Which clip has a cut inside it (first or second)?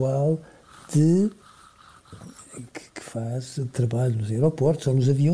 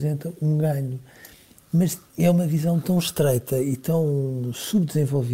second